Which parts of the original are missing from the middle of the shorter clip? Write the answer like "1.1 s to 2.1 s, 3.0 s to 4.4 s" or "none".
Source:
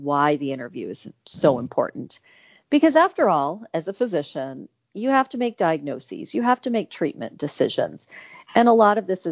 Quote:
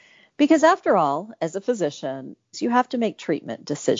4.9 s to 6.3 s